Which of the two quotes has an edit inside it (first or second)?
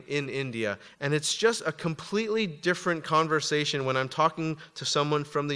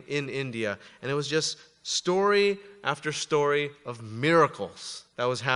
first